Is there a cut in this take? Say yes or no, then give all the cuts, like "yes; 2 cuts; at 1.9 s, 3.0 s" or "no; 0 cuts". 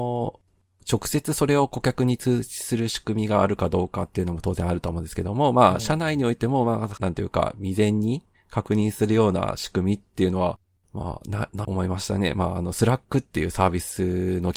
yes; 2 cuts; at 7.0 s, 11.6 s